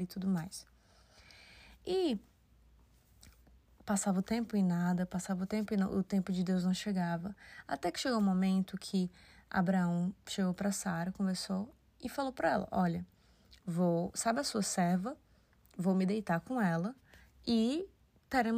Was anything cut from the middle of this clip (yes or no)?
no